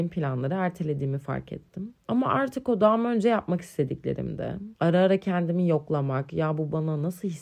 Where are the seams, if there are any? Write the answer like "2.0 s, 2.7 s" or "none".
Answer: 2.0 s